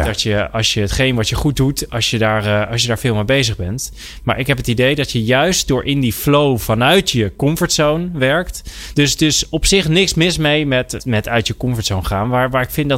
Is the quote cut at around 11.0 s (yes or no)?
yes